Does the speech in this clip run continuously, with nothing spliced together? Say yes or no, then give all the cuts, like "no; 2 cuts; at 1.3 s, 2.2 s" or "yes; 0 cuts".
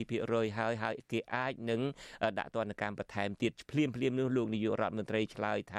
yes; 0 cuts